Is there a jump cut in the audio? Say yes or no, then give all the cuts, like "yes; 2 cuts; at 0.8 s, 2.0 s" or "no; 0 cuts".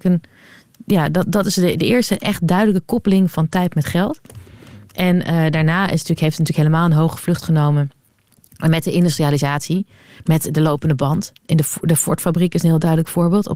no; 0 cuts